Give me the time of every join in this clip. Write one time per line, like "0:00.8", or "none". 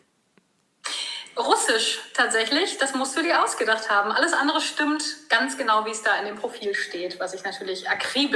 none